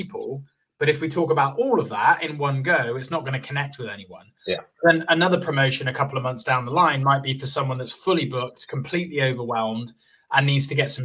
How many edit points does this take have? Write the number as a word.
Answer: one